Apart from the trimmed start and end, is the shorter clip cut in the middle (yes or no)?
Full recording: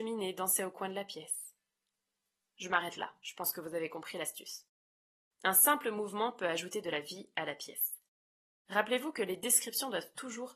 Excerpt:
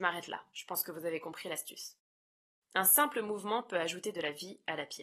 no